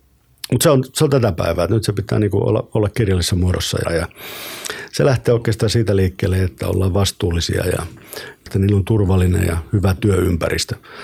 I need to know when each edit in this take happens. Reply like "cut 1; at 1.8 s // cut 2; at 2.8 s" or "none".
cut 1; at 3.8 s // cut 2; at 6.6 s // cut 3; at 8.5 s